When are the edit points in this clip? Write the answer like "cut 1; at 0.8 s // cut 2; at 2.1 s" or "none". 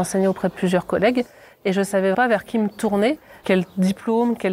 cut 1; at 2.1 s // cut 2; at 3.4 s